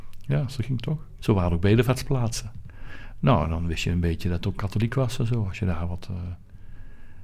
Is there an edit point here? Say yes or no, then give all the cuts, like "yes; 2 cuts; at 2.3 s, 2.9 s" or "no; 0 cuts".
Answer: yes; 1 cut; at 1.2 s